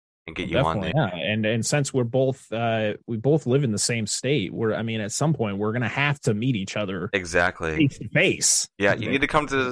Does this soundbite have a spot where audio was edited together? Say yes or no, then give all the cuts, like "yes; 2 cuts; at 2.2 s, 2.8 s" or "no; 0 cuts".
yes; 1 cut; at 0.9 s